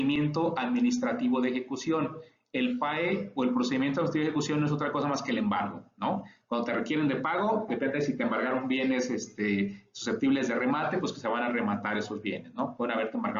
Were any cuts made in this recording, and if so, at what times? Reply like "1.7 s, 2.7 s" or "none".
7.7 s